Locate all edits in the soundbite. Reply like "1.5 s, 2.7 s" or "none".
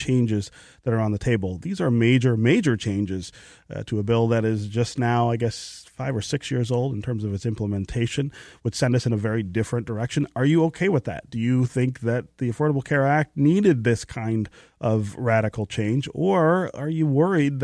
none